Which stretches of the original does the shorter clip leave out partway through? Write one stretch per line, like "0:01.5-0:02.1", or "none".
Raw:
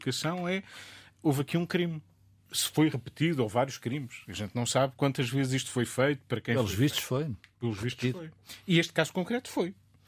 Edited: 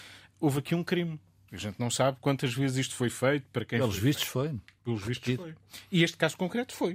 0:02.3-0:04.2